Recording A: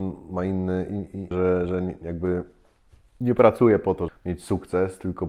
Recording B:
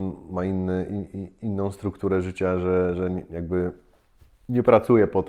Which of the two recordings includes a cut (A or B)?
A